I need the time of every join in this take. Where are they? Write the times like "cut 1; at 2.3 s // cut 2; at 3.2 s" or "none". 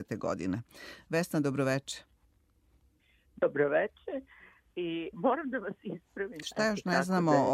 cut 1; at 5.1 s // cut 2; at 6.4 s